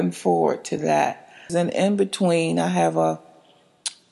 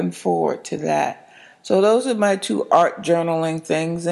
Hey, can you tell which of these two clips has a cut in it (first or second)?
first